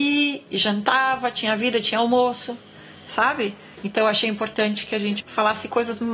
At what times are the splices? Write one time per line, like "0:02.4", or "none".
0:03.7
0:05.2